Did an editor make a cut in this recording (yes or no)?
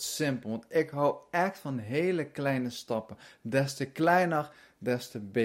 no